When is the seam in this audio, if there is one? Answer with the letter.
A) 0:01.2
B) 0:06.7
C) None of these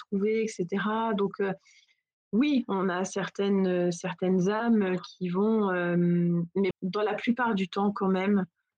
B